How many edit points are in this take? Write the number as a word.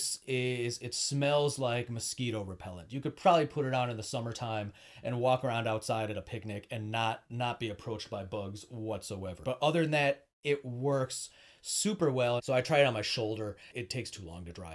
three